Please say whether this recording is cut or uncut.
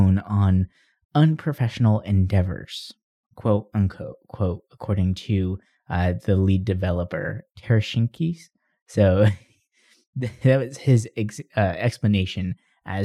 cut